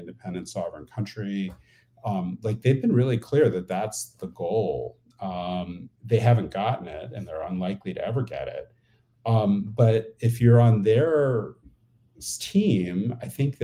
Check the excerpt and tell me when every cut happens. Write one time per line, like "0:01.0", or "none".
none